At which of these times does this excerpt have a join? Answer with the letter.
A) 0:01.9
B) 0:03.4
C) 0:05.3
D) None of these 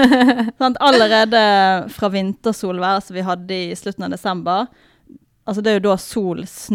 A